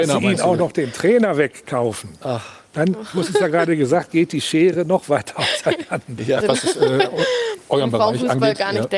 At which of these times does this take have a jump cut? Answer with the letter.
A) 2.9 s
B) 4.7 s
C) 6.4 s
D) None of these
C